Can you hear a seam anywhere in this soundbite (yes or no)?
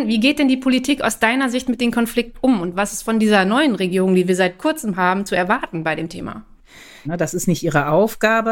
yes